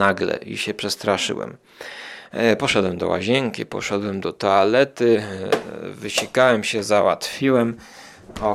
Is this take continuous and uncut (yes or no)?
yes